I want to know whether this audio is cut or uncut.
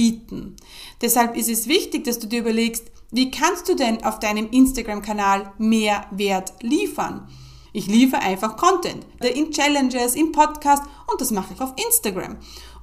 cut